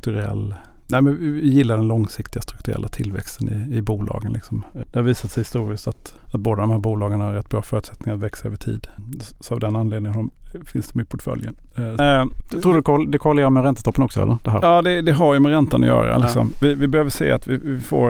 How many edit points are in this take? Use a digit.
2